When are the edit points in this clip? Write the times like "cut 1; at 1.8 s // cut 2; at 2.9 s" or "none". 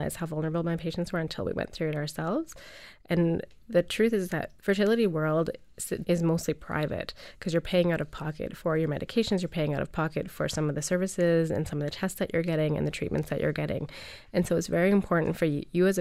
cut 1; at 4.6 s // cut 2; at 6.0 s